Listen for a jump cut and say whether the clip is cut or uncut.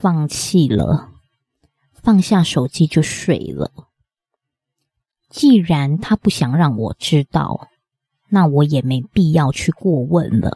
cut